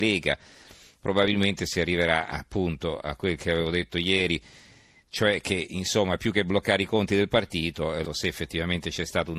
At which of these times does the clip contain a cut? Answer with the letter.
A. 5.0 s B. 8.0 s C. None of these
B